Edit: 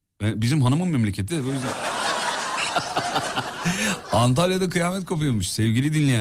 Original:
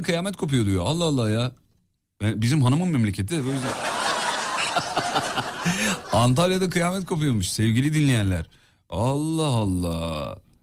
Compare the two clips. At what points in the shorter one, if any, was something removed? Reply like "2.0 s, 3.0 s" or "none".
none